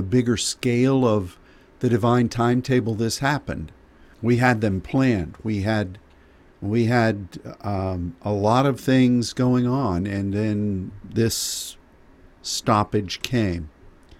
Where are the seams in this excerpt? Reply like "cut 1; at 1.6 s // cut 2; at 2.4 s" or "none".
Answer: cut 1; at 4.1 s